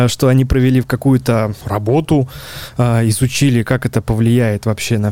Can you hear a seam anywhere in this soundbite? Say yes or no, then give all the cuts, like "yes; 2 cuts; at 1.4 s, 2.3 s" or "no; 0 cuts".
yes; 1 cut; at 1.6 s